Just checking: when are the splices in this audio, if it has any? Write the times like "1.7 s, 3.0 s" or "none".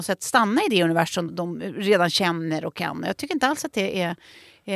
1.3 s